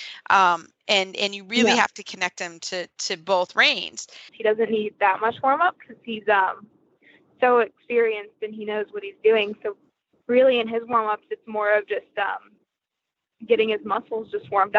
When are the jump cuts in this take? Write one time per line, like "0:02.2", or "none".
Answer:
0:04.3